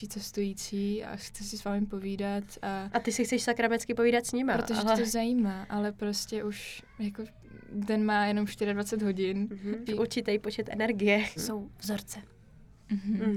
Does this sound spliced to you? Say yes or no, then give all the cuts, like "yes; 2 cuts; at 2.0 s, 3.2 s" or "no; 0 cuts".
yes; 3 cuts; at 1.0 s, 9.9 s, 11.4 s